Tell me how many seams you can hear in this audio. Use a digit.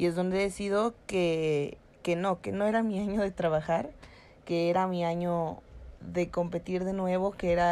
0